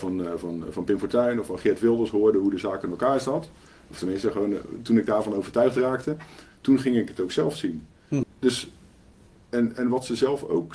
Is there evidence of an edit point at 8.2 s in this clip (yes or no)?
yes